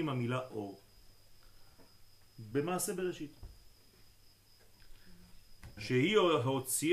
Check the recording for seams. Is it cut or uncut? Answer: uncut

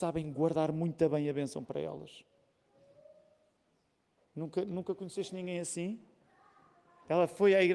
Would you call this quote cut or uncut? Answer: uncut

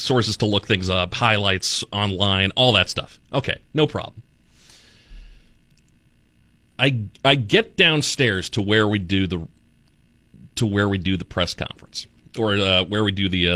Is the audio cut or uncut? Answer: uncut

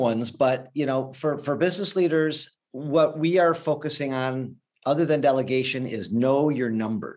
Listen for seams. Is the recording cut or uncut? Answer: uncut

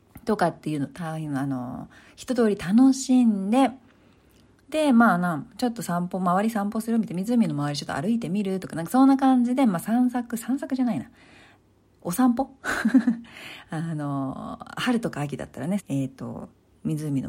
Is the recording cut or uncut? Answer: cut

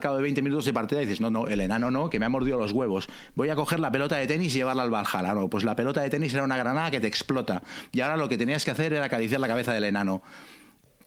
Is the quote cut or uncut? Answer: uncut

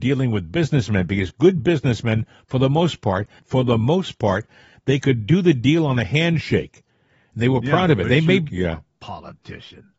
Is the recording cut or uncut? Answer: cut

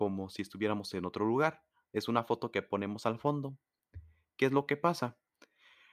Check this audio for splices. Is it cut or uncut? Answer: uncut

